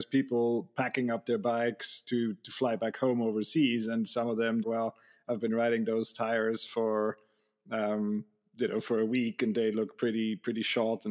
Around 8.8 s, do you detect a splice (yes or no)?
no